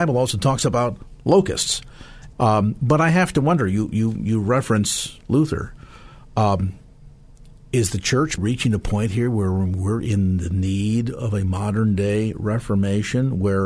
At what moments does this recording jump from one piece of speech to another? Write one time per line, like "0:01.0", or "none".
0:02.3
0:08.4